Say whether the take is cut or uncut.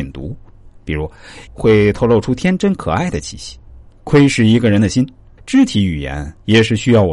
cut